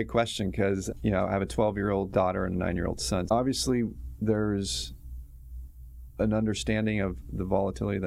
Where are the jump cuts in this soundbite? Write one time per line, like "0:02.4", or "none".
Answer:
0:03.3

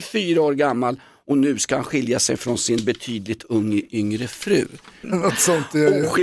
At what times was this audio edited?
0:05.0

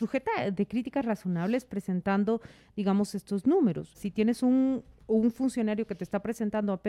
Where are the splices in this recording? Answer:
0:03.9

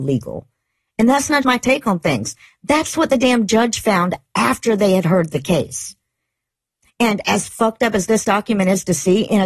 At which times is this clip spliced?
0:01.4

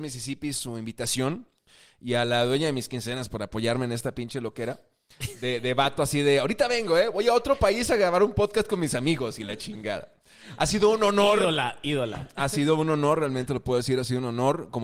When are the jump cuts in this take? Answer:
none

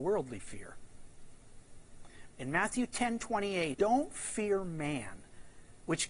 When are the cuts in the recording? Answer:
0:02.3
0:03.7

